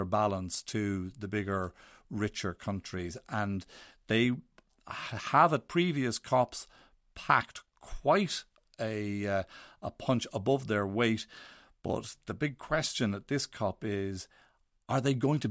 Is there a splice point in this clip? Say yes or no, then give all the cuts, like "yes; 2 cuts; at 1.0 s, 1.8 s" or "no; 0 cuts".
no; 0 cuts